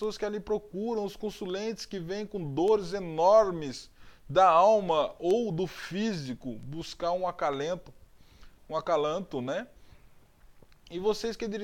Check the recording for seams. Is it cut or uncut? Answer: uncut